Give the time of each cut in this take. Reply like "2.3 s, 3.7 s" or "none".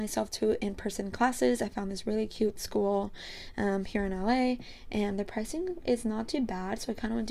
none